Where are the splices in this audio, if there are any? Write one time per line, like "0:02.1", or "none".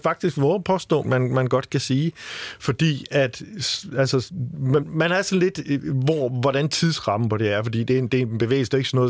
0:01.0
0:04.8